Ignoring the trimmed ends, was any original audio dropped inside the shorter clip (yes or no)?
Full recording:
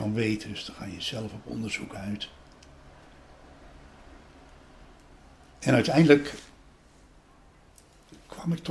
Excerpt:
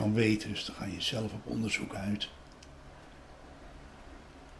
no